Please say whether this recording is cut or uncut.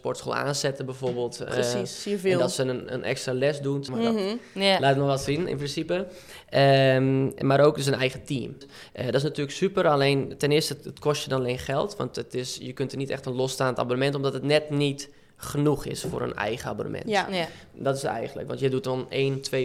cut